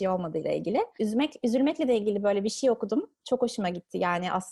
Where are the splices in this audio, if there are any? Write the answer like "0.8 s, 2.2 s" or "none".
1.0 s